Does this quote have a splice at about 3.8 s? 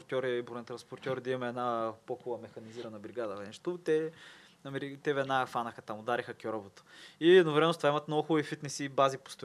no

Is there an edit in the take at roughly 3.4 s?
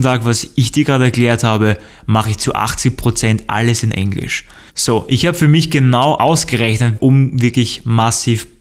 no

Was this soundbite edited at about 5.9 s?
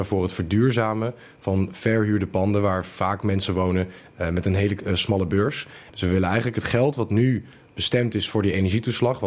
yes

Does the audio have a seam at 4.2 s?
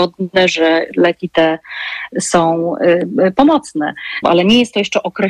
yes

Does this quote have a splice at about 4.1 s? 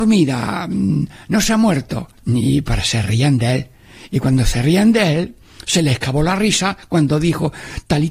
no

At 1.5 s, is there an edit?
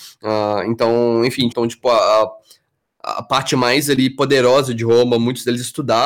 yes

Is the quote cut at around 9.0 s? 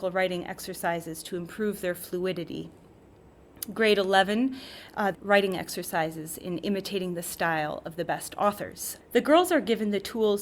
yes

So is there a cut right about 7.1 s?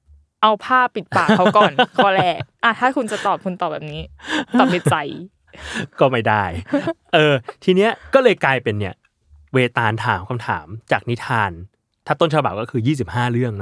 no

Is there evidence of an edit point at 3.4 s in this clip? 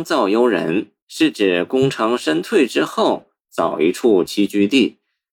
no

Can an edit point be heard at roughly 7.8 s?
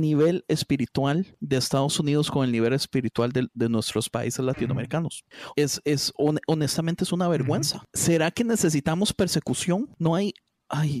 no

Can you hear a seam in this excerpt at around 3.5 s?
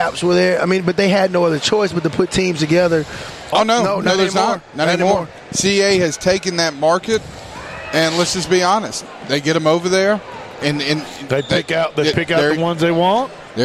yes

